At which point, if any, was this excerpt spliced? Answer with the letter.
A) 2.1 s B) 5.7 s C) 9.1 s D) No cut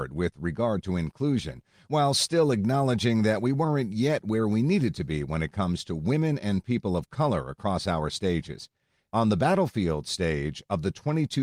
C